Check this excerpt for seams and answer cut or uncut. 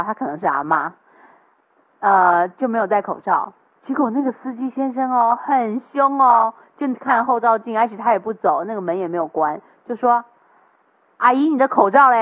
uncut